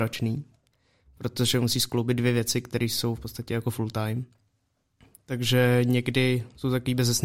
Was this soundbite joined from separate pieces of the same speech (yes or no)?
no